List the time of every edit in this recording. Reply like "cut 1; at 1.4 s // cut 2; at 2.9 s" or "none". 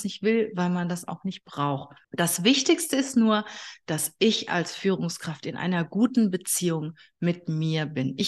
cut 1; at 2.0 s